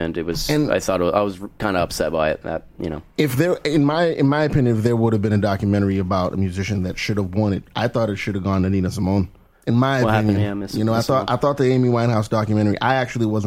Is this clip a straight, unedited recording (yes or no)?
yes